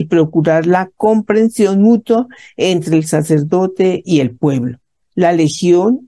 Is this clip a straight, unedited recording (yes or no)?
no